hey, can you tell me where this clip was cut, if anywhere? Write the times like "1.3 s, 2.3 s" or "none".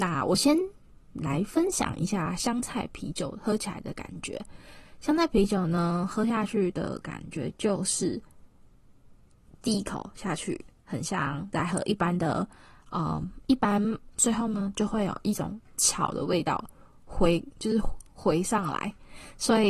14.2 s